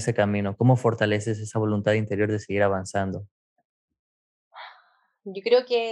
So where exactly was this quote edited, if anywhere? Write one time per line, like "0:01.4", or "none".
none